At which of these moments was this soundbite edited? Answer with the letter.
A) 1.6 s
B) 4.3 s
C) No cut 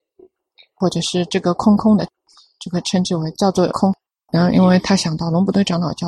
B